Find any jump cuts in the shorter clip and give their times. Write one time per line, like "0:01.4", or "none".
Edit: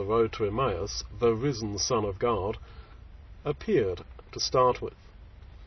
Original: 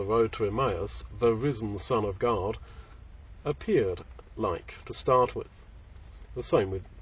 0:04.3